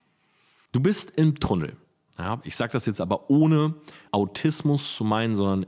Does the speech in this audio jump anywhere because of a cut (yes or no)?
yes